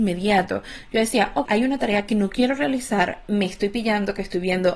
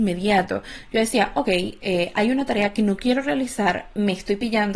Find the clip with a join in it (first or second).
first